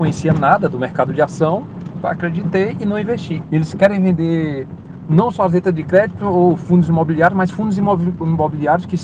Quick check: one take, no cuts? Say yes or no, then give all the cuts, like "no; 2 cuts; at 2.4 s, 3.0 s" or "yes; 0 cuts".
no; 1 cut; at 3.4 s